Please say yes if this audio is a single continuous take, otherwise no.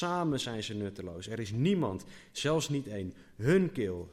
yes